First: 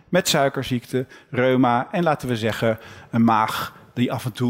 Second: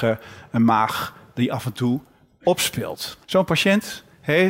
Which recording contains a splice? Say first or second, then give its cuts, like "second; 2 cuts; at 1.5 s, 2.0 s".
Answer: second; 1 cut; at 3.2 s